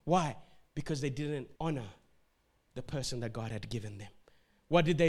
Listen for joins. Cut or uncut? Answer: cut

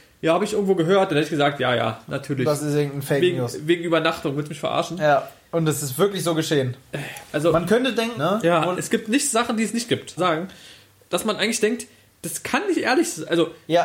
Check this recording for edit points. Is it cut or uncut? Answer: cut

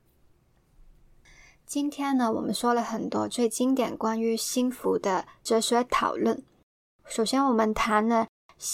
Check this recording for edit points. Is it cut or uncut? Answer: uncut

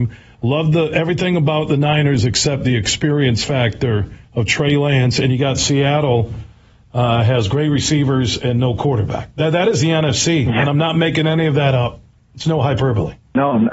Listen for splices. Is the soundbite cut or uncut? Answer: cut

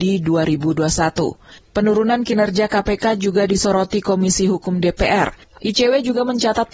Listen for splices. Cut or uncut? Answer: cut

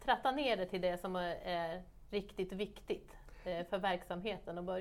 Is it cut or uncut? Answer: uncut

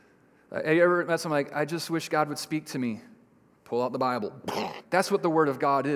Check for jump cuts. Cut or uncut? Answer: cut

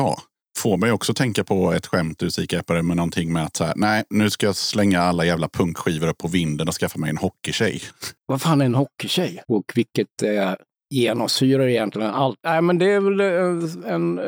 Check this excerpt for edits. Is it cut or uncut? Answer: cut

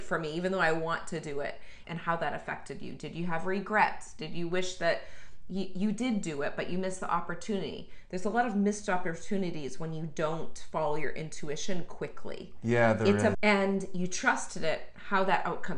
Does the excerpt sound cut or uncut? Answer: cut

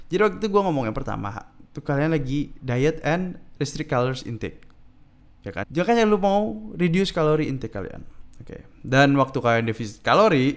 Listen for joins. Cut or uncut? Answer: cut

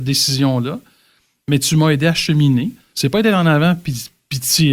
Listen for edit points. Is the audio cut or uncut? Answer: cut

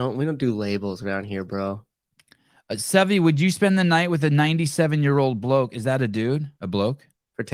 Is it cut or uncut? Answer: cut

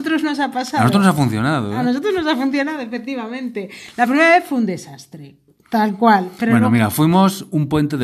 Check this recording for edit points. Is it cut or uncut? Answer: uncut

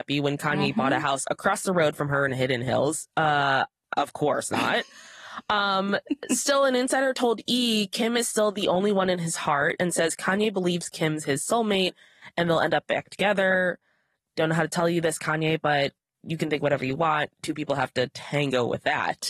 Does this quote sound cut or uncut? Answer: uncut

